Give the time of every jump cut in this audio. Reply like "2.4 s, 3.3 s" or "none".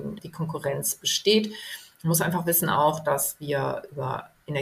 none